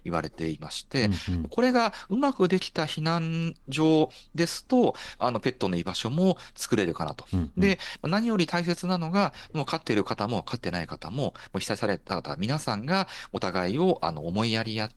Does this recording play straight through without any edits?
no; 1 cut; at 7.2 s

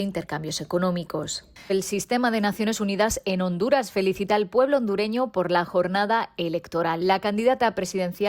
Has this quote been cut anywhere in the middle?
yes; 1 cut; at 1.7 s

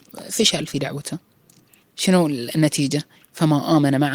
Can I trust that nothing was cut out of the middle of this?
no; 1 cut; at 1.8 s

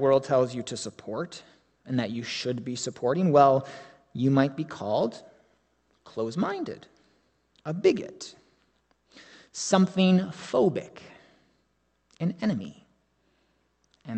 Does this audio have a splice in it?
yes; 1 cut; at 7.5 s

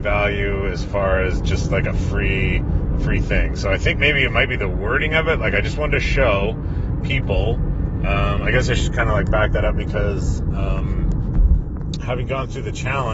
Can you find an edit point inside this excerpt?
no; 0 cuts

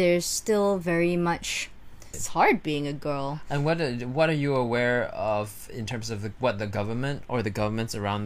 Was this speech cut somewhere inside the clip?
yes; 1 cut; at 2.1 s

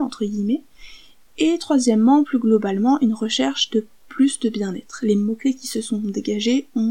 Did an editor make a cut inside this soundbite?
no; 0 cuts

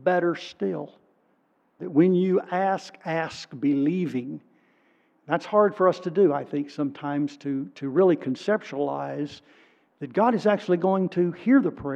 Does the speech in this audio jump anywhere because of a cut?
yes; 1 cut; at 1.8 s

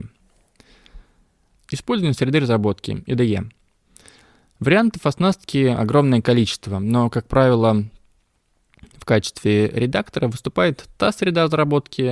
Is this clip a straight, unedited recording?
yes; 0 cuts

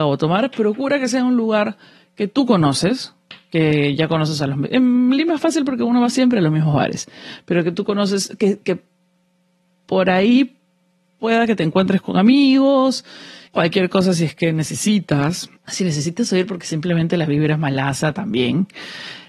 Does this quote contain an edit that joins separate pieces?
yes; 2 cuts; at 13.5 s, 15.6 s

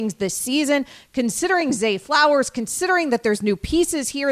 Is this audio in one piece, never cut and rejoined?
yes; 0 cuts

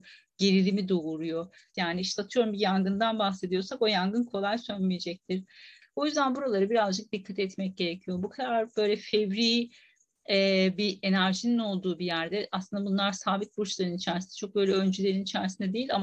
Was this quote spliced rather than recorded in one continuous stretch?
yes; 2 cuts; at 1.7 s, 5.8 s

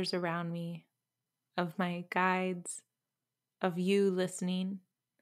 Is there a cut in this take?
no; 0 cuts

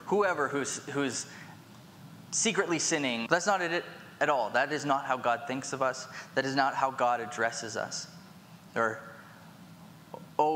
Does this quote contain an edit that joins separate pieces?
yes; 2 cuts; at 3.3 s, 8.7 s

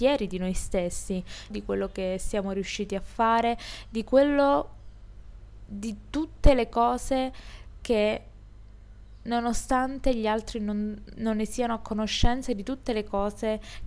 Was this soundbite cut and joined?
yes; 2 cuts; at 1.5 s, 11.1 s

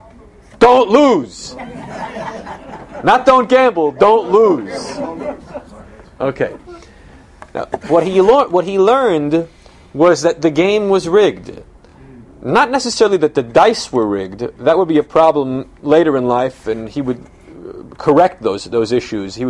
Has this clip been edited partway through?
no; 0 cuts

